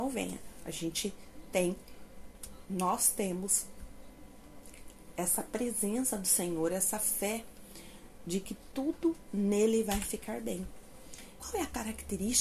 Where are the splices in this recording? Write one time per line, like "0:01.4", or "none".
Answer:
0:11.4